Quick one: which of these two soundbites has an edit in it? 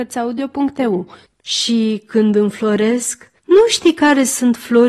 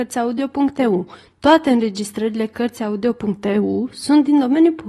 first; 2 cuts; at 1.2 s, 3.4 s

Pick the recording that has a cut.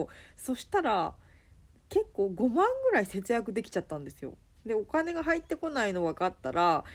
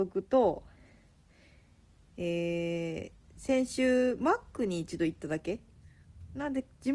first; 1 cut; at 4.6 s

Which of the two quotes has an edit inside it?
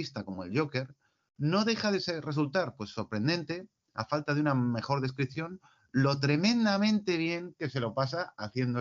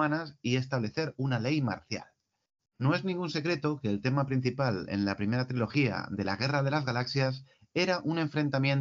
second; 1 cut; at 2.6 s

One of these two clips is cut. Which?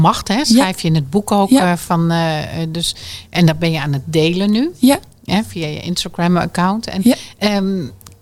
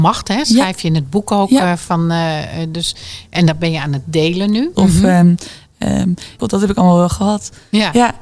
second; 2 cuts; at 4.7 s, 6.4 s

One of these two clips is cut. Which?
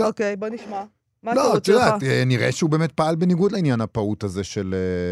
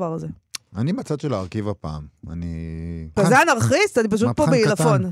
second; 1 cut; at 3.2 s

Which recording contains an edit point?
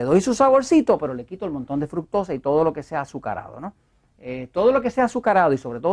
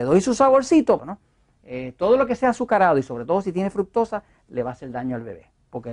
second; 1 cut; at 1.0 s

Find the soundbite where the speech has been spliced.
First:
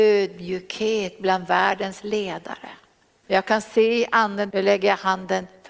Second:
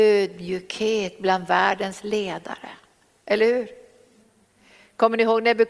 first; 2 cuts; at 3.2 s, 4.5 s

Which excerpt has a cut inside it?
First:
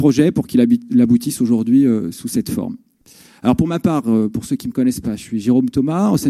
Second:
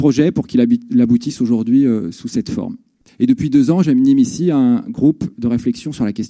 second; 1 cut; at 3.1 s

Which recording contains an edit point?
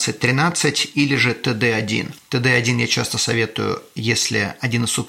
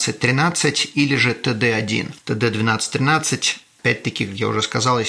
second; 1 cut; at 2.2 s

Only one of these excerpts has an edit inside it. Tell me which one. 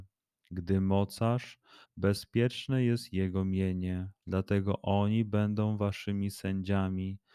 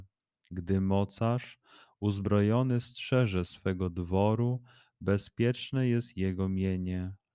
first; 2 cuts; at 1.9 s, 4.2 s

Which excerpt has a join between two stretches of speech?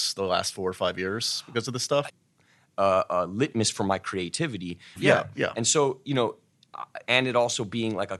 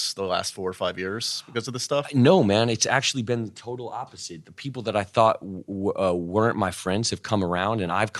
first; 3 cuts; at 2.1 s, 5.0 s, 7.1 s

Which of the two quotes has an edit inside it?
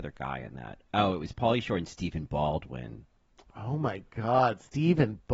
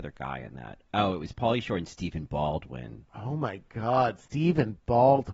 second; 1 cut; at 3.1 s

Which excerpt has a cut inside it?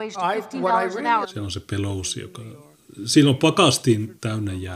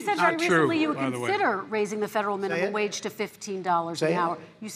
first; 1 cut; at 1.2 s

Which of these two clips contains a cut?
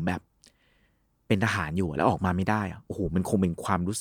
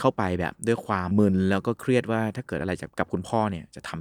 second; 2 cuts; at 1.1 s, 2.9 s

